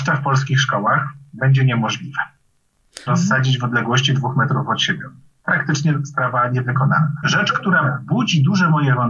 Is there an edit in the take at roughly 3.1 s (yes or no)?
yes